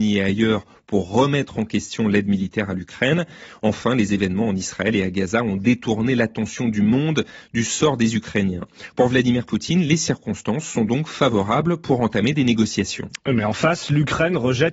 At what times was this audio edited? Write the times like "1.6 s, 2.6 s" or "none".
none